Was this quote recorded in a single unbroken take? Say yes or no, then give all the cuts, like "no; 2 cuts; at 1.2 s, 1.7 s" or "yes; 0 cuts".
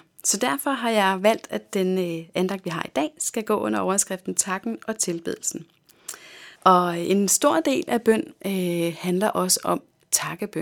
no; 1 cut; at 6.5 s